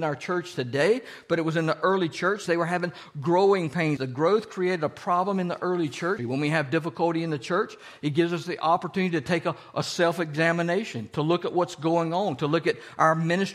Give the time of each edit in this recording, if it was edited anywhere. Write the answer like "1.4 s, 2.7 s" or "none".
2.5 s, 4.0 s, 6.2 s